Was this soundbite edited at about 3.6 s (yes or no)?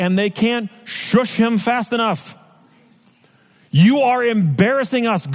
no